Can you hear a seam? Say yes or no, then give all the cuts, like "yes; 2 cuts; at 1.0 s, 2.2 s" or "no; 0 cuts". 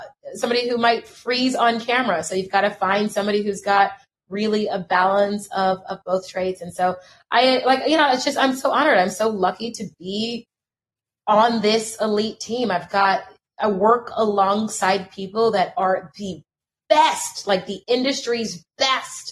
no; 0 cuts